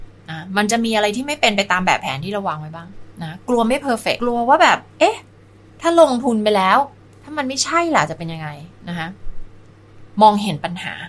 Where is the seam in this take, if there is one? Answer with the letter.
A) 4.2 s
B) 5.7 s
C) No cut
A